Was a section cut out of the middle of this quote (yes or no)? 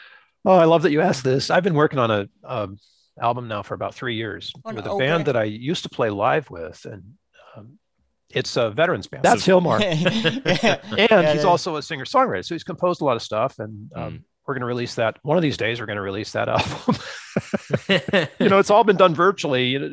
yes